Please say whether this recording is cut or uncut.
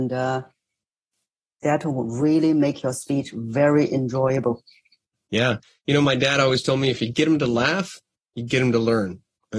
uncut